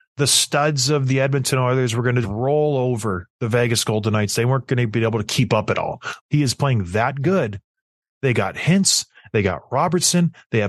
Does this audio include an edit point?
yes; 2 cuts; at 2.2 s, 6.2 s

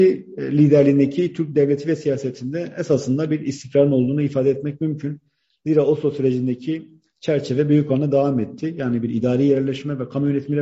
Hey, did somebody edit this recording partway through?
no; 0 cuts

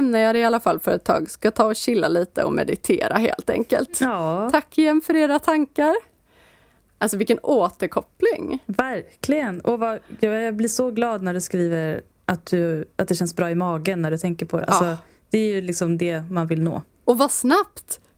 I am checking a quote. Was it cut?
no; 0 cuts

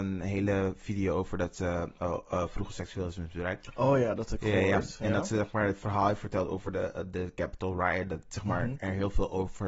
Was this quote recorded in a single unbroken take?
yes; 0 cuts

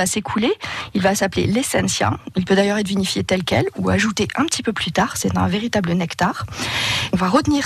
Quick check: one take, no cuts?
yes; 0 cuts

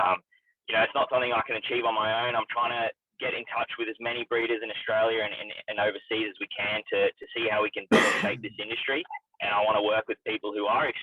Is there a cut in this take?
no; 0 cuts

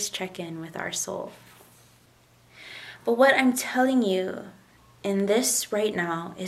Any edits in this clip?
no; 0 cuts

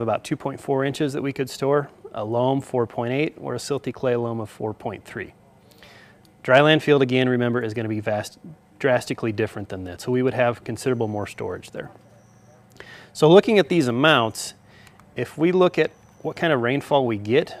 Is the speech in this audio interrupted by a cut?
yes; 1 cut; at 10.0 s

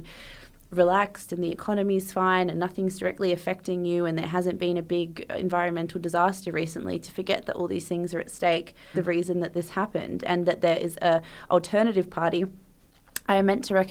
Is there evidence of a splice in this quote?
yes; 1 cut; at 8.9 s

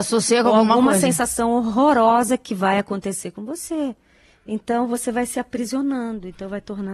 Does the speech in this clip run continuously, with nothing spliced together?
yes; 0 cuts

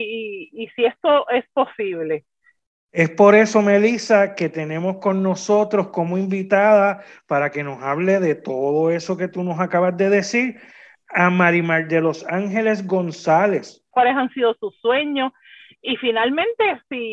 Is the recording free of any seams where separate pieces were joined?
no; 1 cut; at 13.9 s

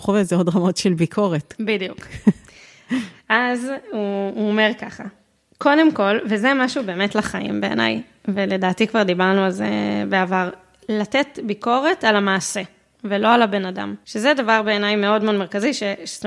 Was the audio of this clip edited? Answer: no; 0 cuts

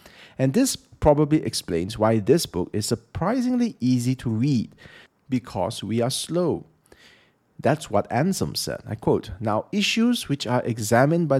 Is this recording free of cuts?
no; 1 cut; at 5.1 s

